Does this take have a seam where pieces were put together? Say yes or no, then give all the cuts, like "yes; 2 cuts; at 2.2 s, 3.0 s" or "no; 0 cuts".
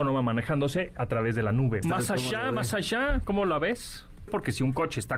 yes; 2 cuts; at 1.8 s, 4.3 s